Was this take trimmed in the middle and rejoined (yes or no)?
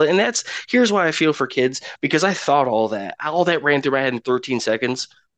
no